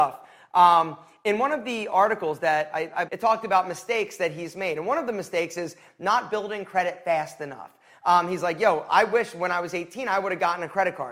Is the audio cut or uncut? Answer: cut